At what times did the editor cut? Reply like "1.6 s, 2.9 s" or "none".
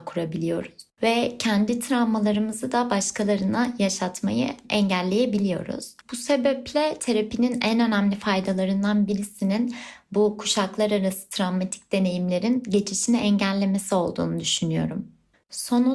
6.0 s